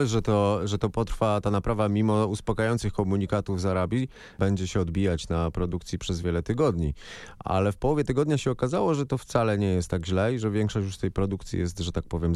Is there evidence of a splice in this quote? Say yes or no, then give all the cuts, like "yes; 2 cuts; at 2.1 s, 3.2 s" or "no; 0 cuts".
yes; 1 cut; at 6.2 s